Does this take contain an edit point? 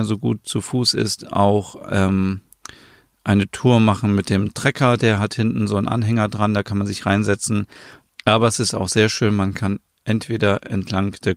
yes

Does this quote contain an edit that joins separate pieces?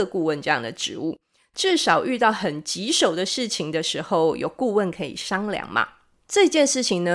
yes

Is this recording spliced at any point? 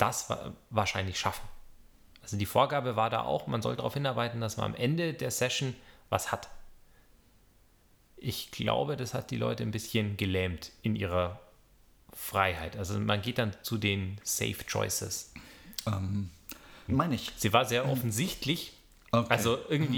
yes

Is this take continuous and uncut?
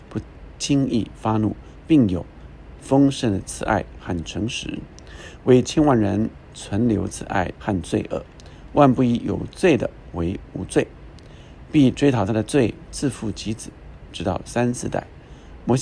no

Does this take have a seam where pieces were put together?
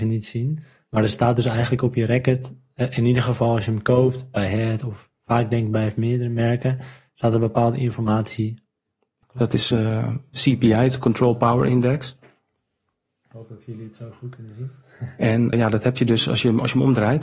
yes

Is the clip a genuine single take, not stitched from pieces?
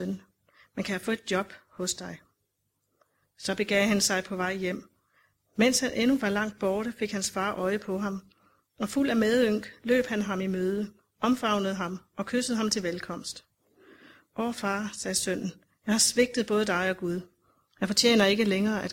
yes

